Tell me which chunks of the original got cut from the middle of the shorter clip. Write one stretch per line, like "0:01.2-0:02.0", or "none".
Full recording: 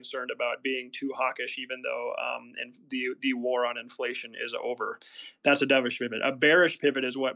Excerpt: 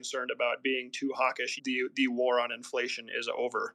0:01.6-0:02.8

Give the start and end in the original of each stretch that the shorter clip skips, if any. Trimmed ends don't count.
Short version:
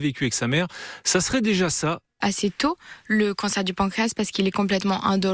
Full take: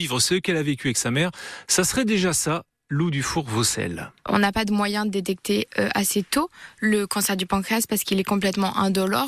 0:02.8-0:05.9

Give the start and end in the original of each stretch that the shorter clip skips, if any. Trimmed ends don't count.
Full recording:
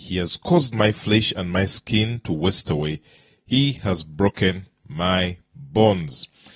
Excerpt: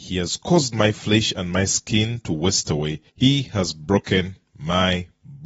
0:03.1-0:03.4

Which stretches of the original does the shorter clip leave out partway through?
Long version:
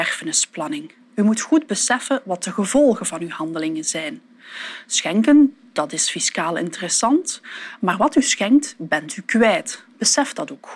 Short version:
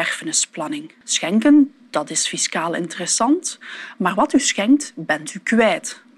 0:01.0-0:04.8

